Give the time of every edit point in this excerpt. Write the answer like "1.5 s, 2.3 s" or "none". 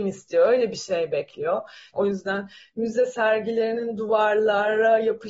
1.9 s

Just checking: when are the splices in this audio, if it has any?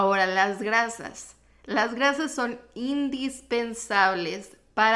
none

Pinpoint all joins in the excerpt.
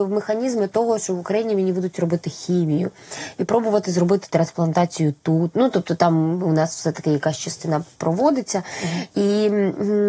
none

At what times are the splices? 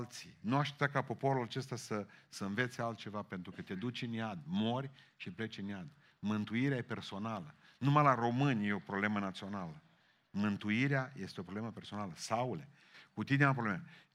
none

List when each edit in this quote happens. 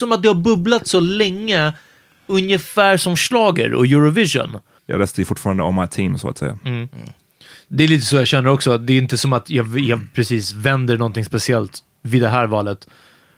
4.8 s

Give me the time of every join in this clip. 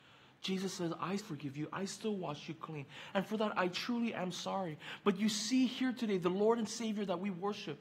1.2 s, 3.1 s

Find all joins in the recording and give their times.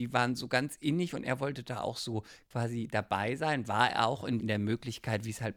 4.4 s

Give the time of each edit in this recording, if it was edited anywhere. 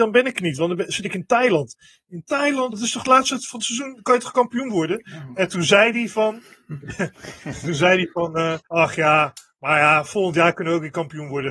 2.7 s, 8.7 s

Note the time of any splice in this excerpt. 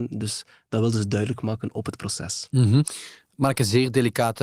none

